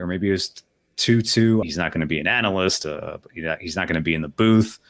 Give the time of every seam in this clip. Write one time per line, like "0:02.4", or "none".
0:01.6